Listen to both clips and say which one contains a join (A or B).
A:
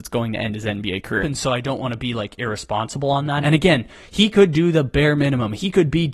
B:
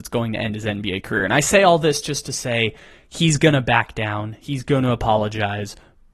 A